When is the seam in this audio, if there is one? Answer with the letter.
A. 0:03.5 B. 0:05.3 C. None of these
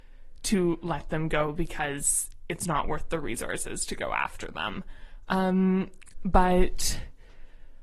B